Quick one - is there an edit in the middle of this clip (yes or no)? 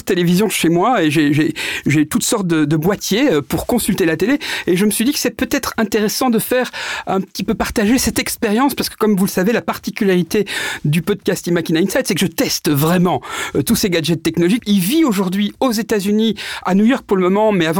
yes